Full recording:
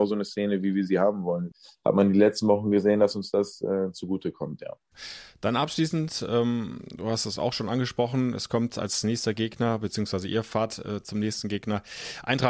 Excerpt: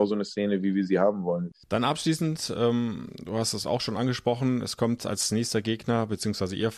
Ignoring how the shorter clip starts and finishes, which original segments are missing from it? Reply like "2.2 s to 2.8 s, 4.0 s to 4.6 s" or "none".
1.6 s to 5.4 s